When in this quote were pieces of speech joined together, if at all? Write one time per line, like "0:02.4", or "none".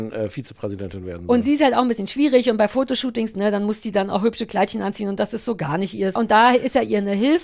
0:03.3
0:06.2